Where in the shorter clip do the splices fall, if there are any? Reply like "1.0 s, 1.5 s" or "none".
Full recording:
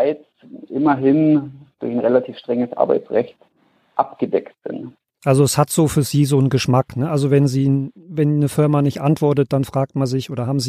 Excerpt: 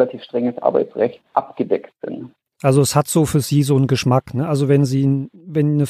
1.3 s